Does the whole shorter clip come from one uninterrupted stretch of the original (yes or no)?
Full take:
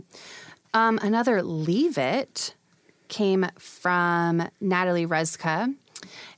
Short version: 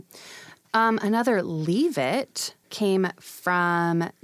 no